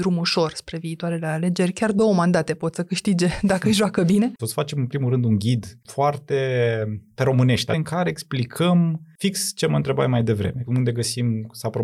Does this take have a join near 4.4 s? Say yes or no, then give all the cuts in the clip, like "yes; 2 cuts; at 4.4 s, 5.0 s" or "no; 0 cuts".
yes; 2 cuts; at 4.4 s, 7.7 s